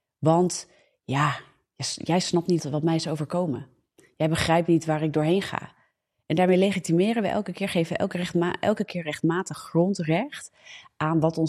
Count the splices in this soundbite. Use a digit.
1